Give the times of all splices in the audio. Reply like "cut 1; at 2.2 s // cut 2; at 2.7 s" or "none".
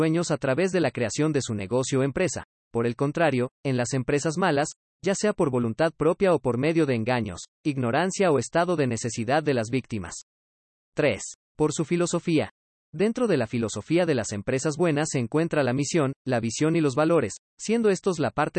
cut 1; at 4.9 s